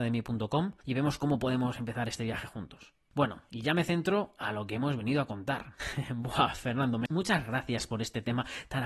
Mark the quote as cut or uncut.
cut